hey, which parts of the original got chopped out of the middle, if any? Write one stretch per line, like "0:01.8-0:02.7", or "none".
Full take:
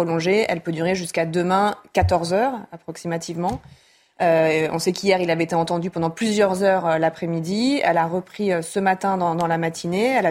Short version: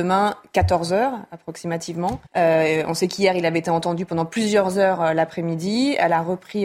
0:03.7-0:04.1